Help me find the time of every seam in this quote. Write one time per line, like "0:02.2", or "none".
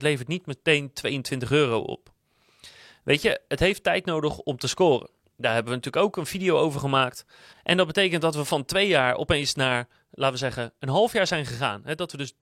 0:07.5

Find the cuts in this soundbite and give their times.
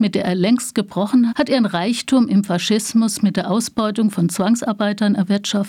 0:01.3

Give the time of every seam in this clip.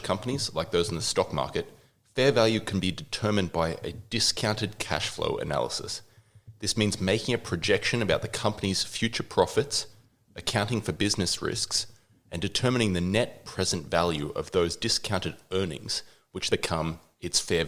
0:16.5

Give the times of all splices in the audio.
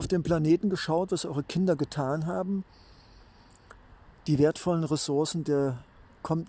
none

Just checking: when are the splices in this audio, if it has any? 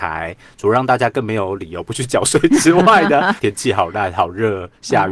0:03.4

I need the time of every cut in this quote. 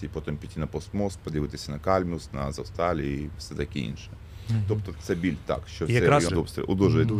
0:04.9
0:06.3

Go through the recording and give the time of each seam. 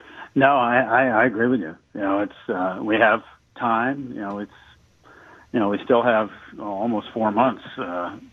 none

